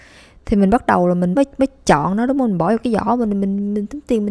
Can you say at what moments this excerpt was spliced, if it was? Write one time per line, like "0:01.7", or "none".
0:01.3